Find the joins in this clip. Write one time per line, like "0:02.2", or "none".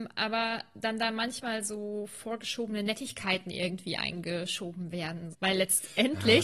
0:05.3